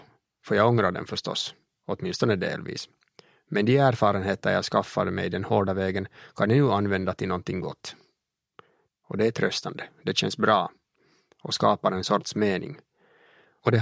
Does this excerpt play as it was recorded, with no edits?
no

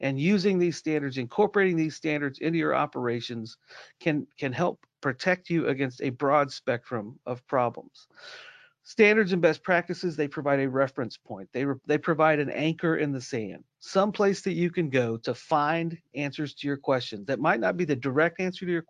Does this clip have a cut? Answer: no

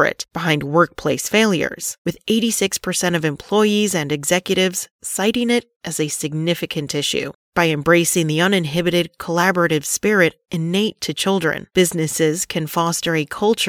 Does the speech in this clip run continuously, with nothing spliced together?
yes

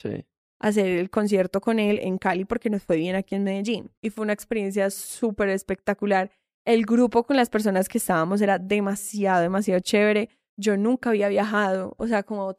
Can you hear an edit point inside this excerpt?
no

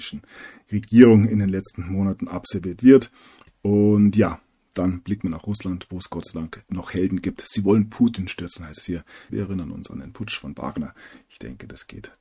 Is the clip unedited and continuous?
no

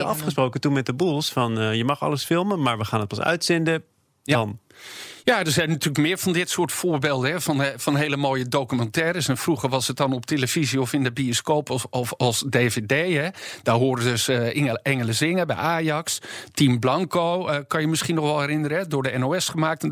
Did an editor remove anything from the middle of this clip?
no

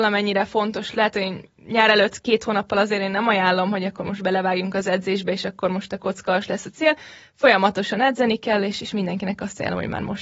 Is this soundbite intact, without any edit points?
yes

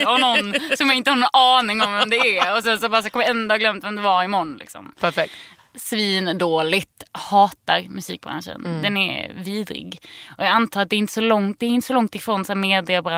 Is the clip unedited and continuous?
yes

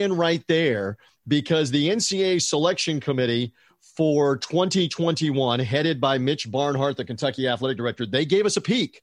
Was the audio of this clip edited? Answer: no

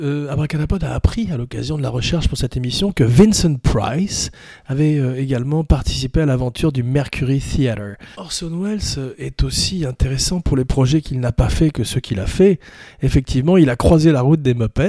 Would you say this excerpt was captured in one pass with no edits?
no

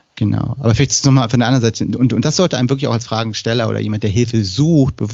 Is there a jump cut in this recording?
no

